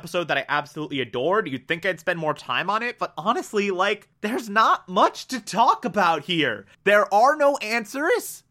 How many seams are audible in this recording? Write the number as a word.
two